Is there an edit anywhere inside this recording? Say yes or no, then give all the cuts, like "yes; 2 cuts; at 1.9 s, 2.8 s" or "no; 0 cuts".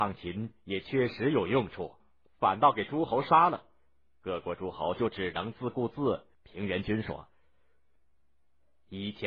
yes; 2 cuts; at 2.0 s, 6.3 s